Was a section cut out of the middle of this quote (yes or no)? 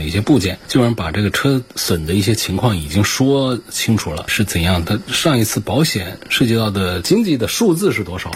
yes